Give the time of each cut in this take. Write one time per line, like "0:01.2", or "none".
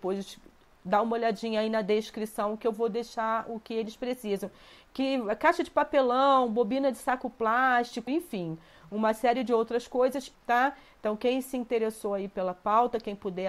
0:08.1
0:10.3